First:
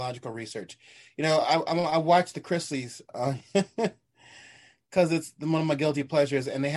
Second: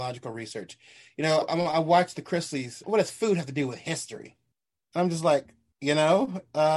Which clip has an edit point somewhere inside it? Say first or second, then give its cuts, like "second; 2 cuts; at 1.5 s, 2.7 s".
second; 2 cuts; at 1.4 s, 2.8 s